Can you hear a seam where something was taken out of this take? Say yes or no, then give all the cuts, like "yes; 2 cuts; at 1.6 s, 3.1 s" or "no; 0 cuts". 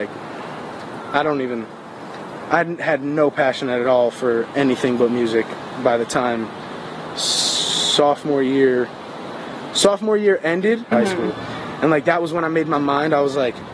yes; 1 cut; at 10.9 s